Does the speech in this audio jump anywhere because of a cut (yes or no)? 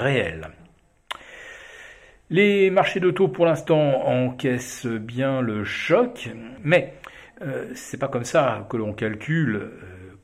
yes